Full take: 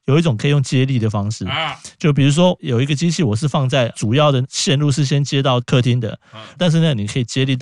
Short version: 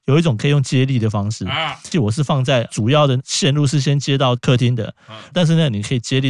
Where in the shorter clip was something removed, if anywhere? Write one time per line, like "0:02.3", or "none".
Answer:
0:01.9